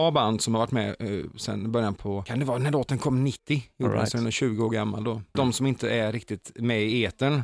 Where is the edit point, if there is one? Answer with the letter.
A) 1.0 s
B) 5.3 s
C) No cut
B